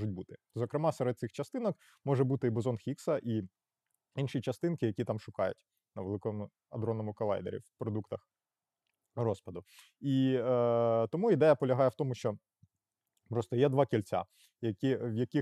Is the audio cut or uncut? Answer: uncut